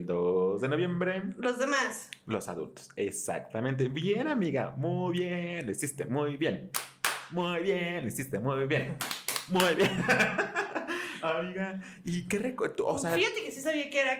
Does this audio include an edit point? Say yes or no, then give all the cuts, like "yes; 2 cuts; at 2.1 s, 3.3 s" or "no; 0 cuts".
no; 0 cuts